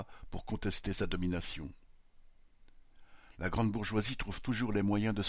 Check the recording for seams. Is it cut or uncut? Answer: uncut